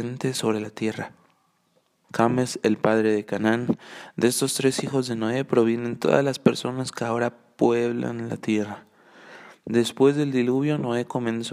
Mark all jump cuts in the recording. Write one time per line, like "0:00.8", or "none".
0:02.0